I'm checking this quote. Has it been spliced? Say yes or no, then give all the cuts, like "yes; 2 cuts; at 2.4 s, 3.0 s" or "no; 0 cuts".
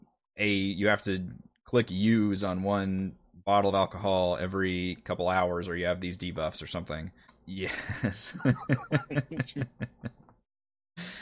yes; 1 cut; at 7.3 s